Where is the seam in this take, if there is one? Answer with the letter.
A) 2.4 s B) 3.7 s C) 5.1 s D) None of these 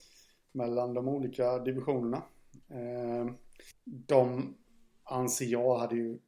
B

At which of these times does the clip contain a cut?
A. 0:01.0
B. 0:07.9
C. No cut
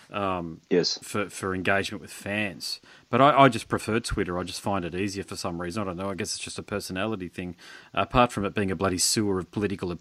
A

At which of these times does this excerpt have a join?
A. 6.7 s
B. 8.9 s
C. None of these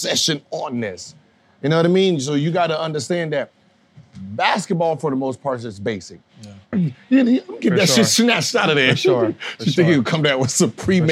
A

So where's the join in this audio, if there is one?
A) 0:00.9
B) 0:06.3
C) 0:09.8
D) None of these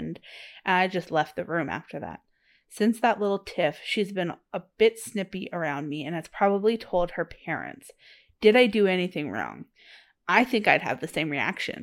D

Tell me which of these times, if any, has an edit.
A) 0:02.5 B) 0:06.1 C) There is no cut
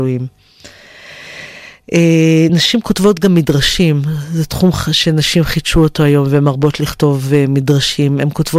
C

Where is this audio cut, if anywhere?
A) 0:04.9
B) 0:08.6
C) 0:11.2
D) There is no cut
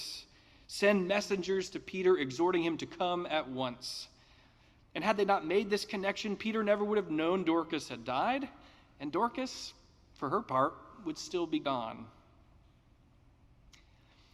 D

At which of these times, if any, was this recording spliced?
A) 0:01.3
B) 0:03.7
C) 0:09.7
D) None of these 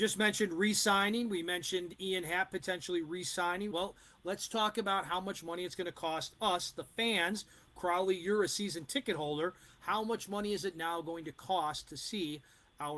B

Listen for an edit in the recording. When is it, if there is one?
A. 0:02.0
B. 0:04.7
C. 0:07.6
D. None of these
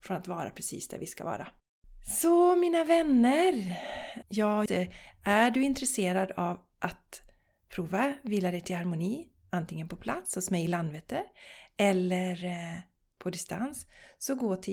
B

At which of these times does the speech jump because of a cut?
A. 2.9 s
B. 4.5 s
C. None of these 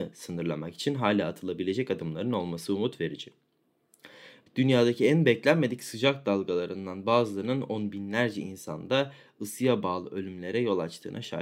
B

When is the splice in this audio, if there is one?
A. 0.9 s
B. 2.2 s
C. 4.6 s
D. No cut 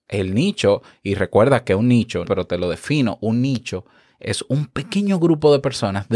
B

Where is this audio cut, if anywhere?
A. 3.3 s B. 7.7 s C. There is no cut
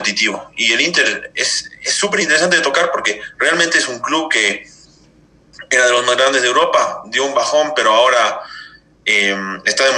C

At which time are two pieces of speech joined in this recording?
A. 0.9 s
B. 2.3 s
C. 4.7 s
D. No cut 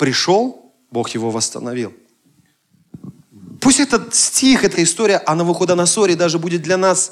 C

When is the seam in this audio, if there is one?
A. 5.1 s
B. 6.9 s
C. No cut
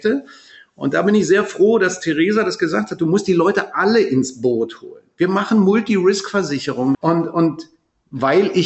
B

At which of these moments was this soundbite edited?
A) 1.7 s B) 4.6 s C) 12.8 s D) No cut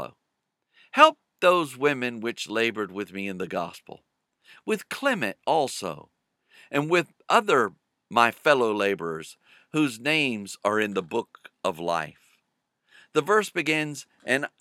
D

